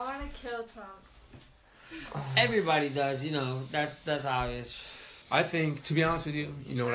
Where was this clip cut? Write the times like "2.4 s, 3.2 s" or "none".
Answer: 5.2 s